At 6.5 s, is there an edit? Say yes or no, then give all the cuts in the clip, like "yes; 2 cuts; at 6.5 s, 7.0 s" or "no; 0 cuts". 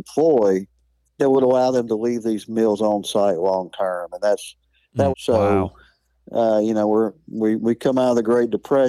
no; 1 cut; at 5.1 s